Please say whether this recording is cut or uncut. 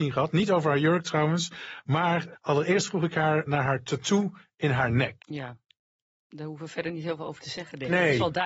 cut